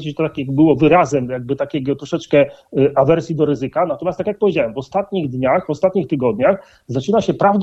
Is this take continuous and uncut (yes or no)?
yes